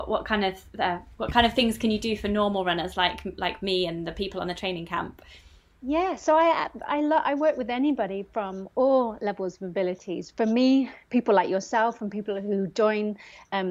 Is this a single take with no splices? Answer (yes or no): yes